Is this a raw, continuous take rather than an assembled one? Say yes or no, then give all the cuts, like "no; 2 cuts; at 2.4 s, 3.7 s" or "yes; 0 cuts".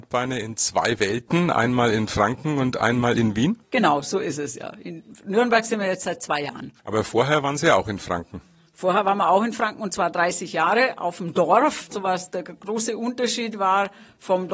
yes; 0 cuts